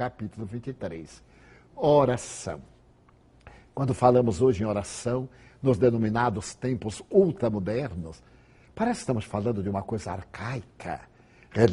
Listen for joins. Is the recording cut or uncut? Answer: uncut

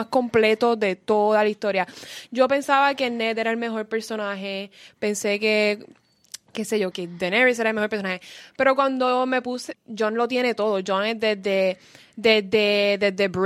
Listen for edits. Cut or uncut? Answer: cut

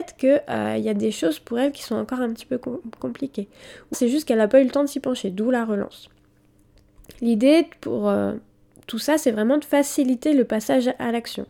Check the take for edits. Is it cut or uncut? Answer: cut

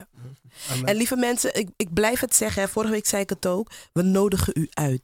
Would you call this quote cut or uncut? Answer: uncut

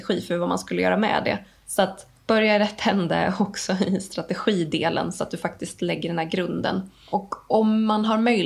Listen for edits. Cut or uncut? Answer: uncut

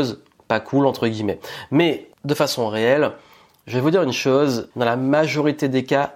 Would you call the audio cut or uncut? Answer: cut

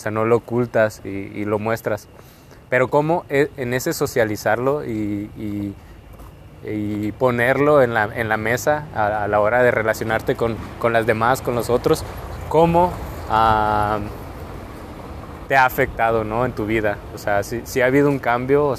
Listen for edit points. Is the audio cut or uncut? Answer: uncut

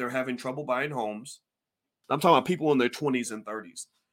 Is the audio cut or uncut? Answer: cut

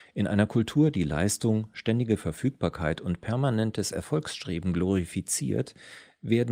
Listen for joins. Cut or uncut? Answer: uncut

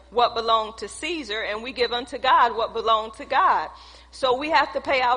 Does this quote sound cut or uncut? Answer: uncut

